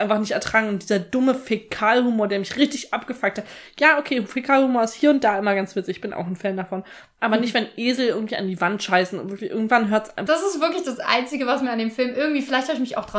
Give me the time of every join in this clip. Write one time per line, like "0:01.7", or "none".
0:10.3